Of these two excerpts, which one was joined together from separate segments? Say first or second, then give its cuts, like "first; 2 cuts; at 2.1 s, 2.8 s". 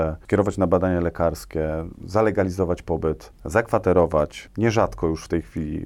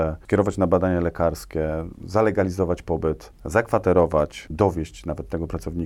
second; 1 cut; at 4.5 s